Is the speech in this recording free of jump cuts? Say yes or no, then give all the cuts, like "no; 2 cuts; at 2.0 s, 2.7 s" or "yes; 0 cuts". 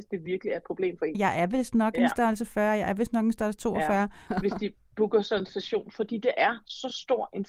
no; 2 cuts; at 1.1 s, 4.3 s